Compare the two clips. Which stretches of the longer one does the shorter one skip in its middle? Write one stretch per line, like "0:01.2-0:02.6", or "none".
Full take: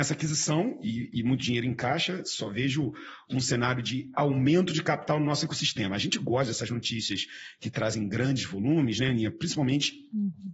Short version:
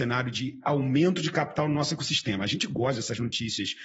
none